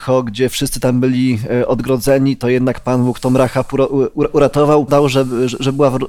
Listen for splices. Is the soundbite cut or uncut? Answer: cut